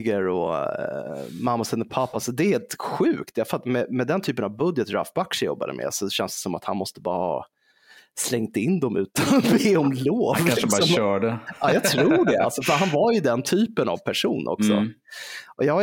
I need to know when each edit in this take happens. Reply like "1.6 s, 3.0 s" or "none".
none

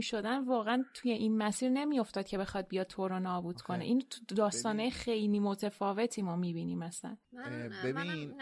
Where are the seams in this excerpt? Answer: none

